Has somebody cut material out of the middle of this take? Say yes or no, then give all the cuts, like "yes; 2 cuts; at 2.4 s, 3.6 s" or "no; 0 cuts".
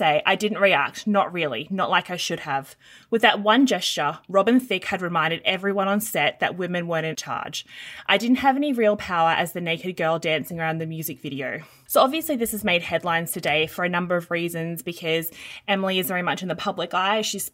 yes; 1 cut; at 11.9 s